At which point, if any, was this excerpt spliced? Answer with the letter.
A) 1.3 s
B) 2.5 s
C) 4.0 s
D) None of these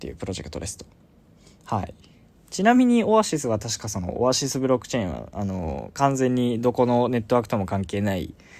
D